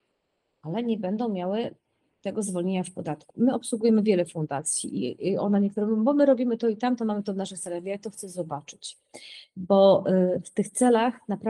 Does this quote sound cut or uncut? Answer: cut